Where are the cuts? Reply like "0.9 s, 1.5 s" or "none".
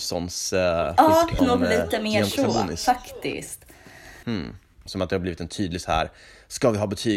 1.4 s, 4.9 s